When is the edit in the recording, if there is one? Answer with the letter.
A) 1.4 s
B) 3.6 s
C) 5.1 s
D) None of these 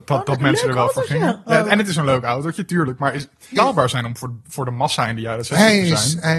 B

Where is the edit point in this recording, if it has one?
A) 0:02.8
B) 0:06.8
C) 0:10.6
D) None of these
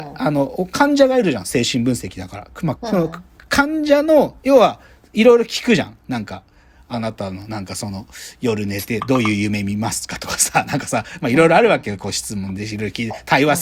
A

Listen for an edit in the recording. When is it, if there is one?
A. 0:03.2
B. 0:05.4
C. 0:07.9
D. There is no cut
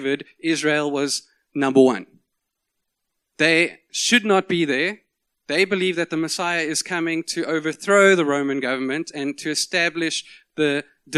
A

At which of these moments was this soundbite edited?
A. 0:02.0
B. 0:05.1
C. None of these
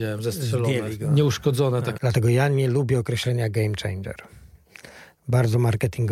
A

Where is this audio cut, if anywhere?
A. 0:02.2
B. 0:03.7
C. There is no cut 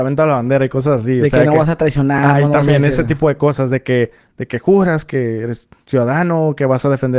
C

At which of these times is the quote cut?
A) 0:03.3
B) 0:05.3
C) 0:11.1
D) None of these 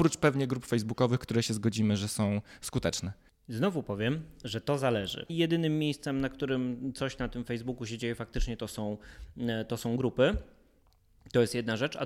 B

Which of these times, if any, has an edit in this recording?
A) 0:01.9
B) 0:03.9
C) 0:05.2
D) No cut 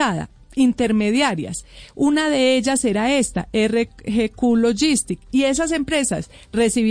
D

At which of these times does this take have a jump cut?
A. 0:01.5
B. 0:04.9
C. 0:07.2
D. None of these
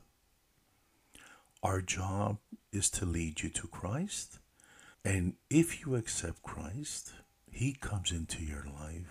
B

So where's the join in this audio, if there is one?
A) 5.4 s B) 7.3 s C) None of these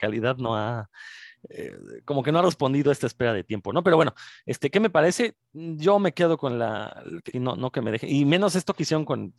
B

